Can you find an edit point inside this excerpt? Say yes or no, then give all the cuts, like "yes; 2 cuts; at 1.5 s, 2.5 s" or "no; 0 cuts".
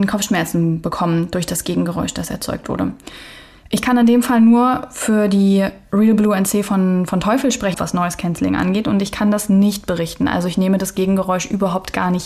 yes; 1 cut; at 7.7 s